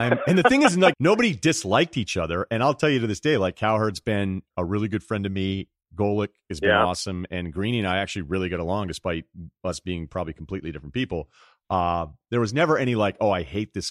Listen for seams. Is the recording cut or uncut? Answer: cut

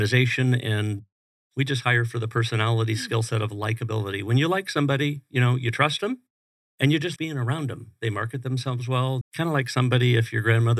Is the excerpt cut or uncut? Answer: cut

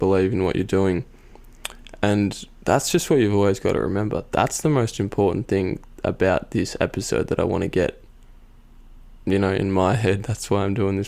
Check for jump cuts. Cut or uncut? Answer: uncut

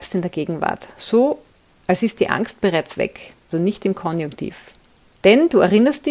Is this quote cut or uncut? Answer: cut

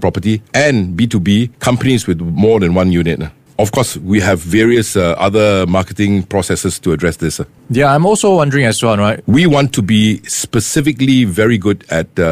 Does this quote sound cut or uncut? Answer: cut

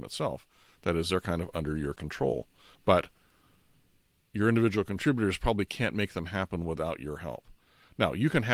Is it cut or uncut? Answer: uncut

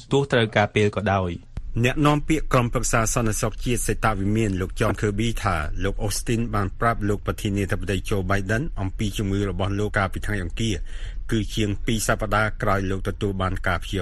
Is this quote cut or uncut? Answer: cut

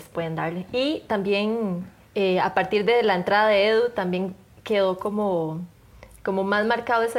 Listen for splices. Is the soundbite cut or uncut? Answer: cut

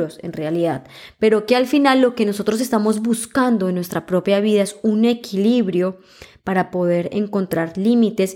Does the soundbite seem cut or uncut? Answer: uncut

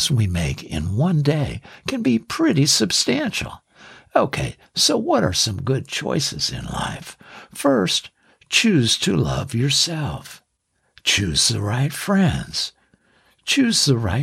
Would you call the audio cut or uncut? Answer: uncut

